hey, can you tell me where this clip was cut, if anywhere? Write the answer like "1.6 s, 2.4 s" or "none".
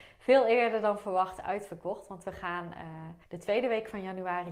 3.2 s

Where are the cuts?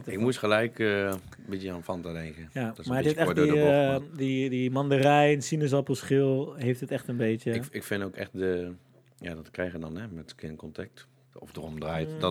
11.3 s

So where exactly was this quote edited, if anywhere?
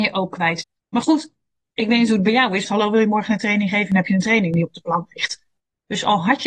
2.6 s

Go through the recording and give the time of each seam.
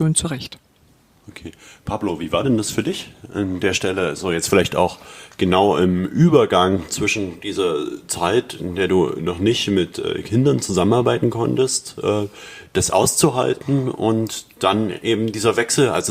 none

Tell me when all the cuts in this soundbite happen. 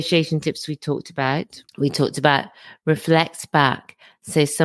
1.7 s

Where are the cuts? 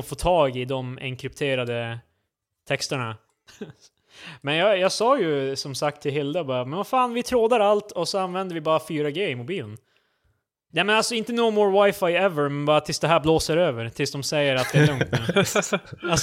3.3 s, 10.7 s

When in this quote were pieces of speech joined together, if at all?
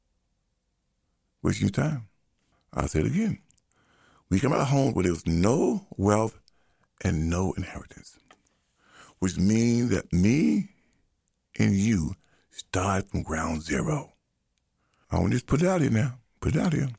2.5 s, 15.0 s

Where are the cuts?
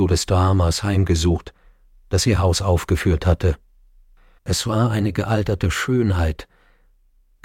4.4 s

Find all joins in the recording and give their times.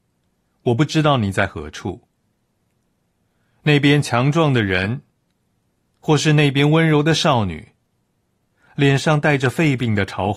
none

